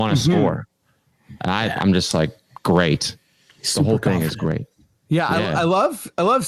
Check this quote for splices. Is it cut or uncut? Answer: uncut